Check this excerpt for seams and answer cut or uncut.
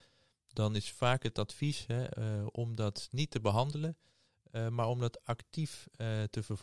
uncut